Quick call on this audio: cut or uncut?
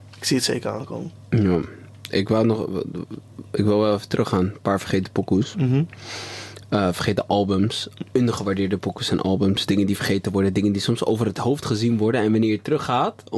uncut